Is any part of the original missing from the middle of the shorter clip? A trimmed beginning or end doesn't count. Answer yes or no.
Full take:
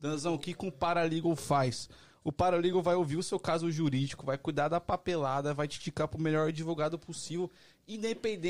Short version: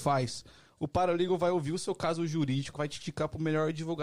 yes